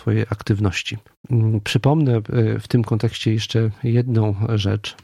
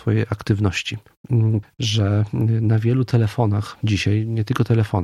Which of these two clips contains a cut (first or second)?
second